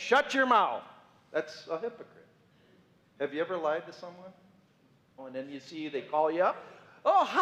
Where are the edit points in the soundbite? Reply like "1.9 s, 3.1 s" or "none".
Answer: 3.0 s, 5.2 s